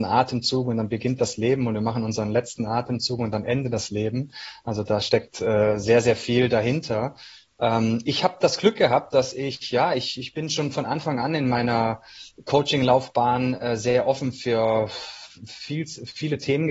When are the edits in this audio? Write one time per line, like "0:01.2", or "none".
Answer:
none